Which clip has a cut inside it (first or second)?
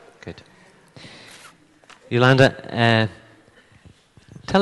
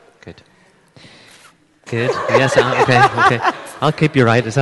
second